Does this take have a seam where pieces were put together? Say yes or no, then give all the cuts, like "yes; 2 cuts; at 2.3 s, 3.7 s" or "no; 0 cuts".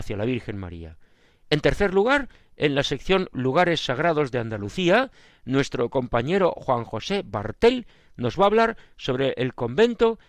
no; 0 cuts